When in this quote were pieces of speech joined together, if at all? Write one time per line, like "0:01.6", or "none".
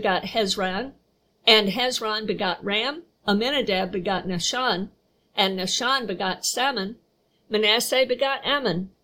0:03.1
0:07.3

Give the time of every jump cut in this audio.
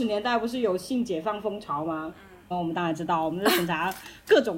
0:02.5

